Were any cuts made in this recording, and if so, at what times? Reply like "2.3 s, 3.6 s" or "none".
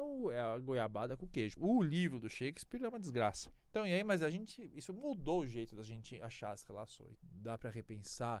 1.6 s, 7.1 s